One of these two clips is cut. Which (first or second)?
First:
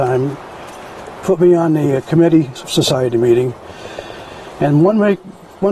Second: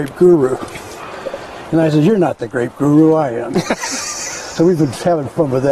first